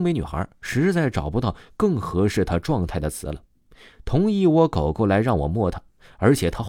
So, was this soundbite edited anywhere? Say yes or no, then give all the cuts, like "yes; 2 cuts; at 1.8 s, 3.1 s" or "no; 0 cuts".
no; 0 cuts